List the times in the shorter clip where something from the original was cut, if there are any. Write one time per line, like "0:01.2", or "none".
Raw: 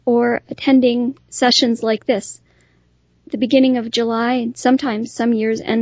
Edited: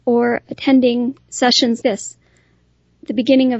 0:01.8